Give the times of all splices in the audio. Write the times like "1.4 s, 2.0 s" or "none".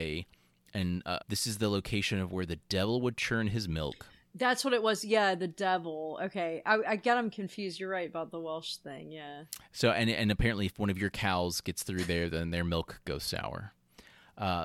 1.2 s

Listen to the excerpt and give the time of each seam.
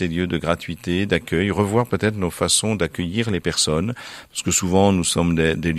none

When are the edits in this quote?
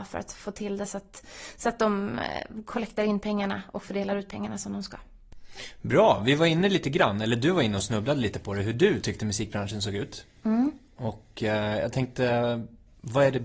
none

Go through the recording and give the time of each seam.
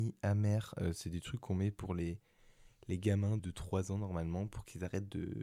3.4 s

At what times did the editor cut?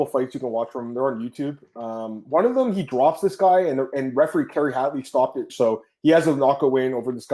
5.5 s

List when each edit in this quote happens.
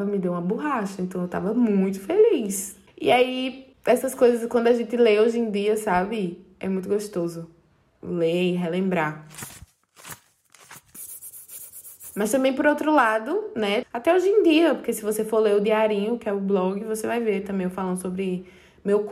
13.8 s

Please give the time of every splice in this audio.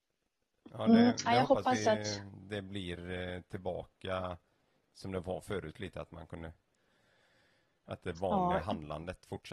none

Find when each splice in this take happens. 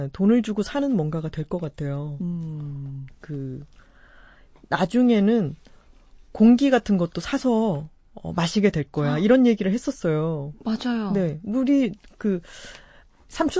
3.1 s

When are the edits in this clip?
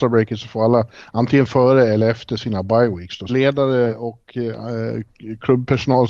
3.3 s

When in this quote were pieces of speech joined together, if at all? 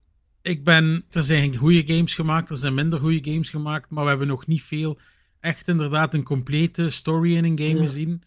1.1 s

